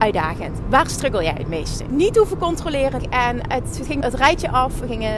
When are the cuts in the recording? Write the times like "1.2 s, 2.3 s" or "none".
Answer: 1.9 s, 3.0 s, 4.0 s